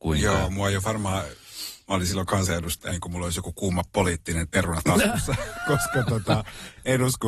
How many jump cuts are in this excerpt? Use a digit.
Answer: 1